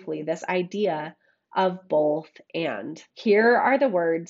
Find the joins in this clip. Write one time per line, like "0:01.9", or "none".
0:03.1